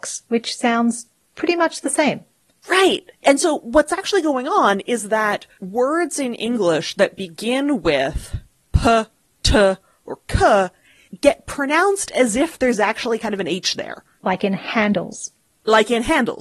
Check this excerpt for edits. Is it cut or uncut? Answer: uncut